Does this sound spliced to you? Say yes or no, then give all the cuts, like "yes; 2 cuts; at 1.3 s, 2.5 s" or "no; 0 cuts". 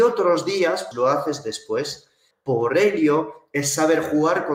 yes; 2 cuts; at 0.9 s, 2.3 s